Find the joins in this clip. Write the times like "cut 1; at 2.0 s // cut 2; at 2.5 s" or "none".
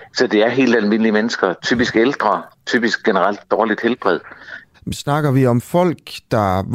cut 1; at 4.7 s